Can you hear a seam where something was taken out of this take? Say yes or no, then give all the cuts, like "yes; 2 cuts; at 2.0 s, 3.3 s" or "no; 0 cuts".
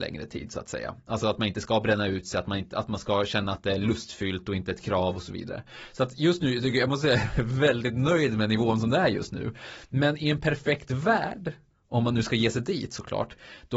no; 0 cuts